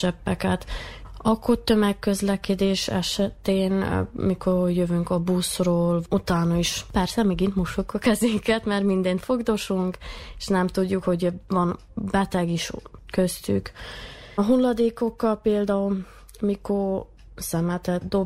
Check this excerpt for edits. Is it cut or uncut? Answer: uncut